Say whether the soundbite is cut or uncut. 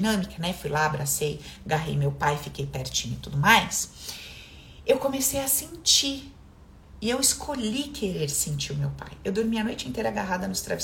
uncut